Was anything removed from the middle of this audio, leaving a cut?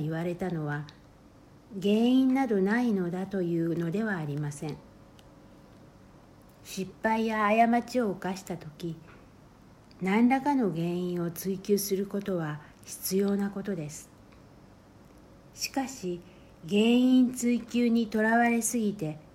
no; 0 cuts

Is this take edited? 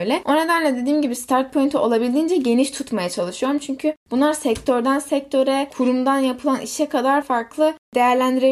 yes; 1 cut; at 7.2 s

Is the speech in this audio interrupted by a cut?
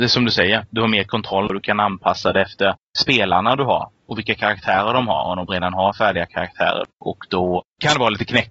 yes; 1 cut; at 6.9 s

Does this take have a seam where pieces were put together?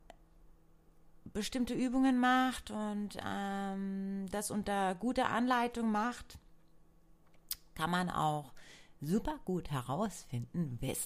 no; 0 cuts

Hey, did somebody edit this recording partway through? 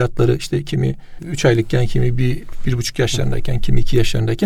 no; 0 cuts

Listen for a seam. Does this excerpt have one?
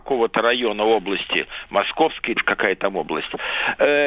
yes; 1 cut; at 2.4 s

